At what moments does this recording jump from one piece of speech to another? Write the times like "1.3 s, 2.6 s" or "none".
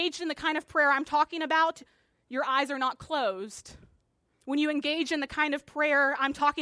2.1 s, 4.3 s